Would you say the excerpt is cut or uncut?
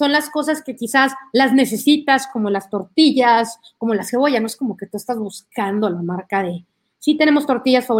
uncut